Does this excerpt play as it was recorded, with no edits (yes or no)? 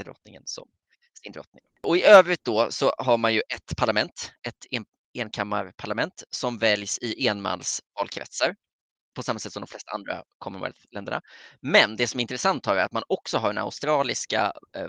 yes